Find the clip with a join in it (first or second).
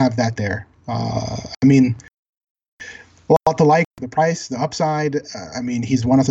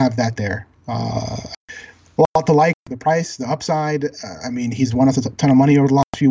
second